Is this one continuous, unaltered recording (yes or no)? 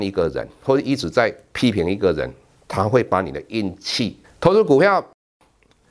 no